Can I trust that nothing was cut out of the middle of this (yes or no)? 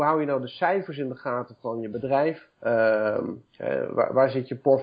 no